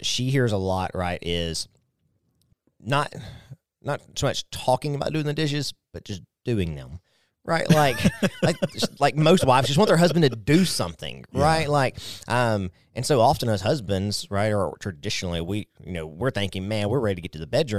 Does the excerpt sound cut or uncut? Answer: uncut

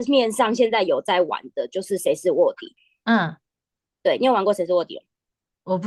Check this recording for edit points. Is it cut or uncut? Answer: uncut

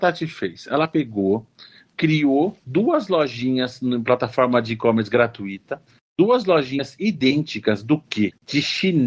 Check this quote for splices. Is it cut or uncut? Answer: uncut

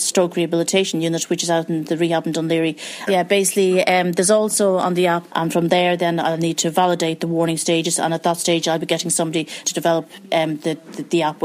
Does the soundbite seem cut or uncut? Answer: cut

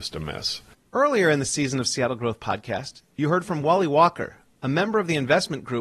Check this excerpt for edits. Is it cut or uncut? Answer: uncut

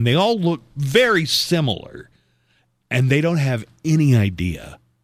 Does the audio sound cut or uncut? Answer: uncut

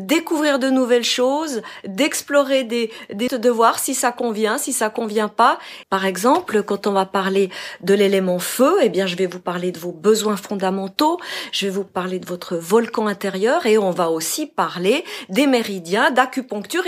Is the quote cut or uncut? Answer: cut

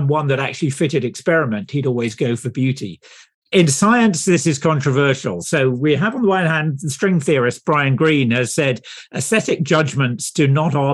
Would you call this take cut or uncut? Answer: cut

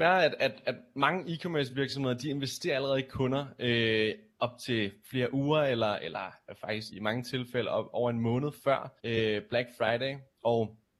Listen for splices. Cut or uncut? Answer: cut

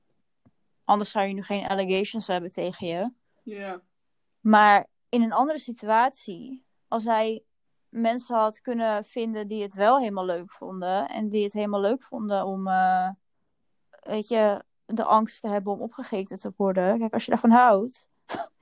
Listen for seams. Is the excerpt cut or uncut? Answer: uncut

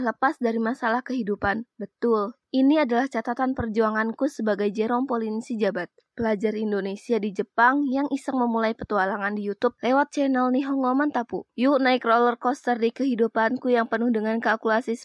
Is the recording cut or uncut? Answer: cut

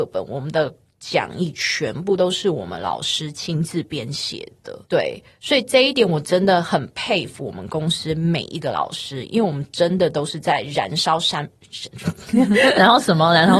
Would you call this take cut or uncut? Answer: cut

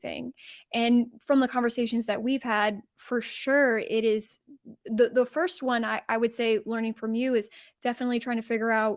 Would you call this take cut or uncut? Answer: cut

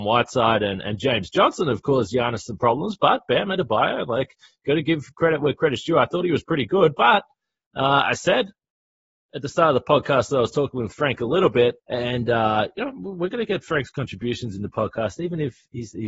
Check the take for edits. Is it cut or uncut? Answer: cut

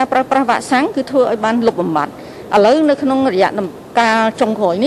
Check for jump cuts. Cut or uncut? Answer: uncut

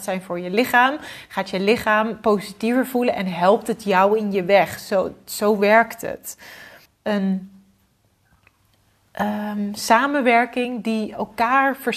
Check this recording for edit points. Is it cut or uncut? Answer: cut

